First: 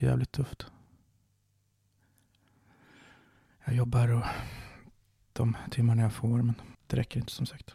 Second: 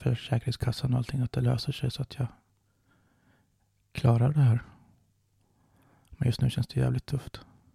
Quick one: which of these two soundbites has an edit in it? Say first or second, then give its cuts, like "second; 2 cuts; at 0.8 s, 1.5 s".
first; 1 cut; at 6.7 s